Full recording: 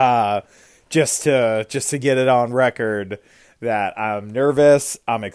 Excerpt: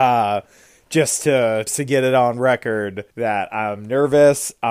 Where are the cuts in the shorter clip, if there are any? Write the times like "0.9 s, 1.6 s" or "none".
1.7 s, 3.1 s